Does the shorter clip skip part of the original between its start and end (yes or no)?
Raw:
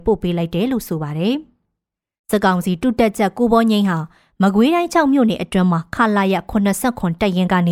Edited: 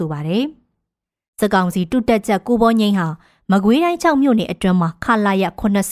no